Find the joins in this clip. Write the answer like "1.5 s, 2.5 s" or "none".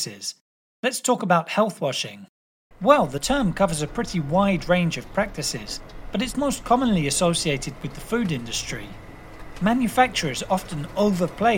2.7 s